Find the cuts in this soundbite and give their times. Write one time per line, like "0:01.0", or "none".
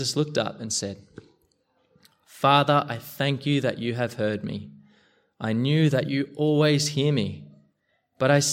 none